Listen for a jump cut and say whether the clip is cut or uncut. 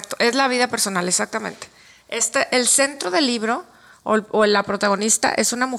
uncut